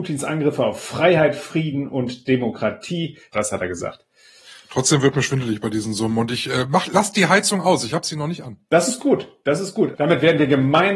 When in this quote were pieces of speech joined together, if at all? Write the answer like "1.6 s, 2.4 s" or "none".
3.3 s, 10.0 s